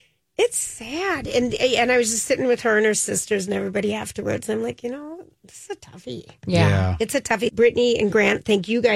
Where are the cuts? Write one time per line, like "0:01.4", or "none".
0:07.5